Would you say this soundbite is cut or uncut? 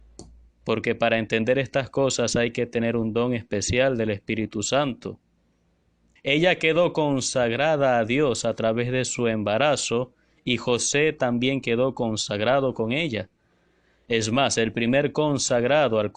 cut